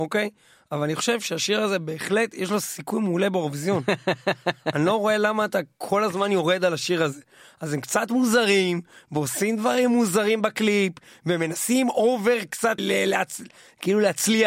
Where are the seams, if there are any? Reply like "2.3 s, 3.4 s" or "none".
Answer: 12.8 s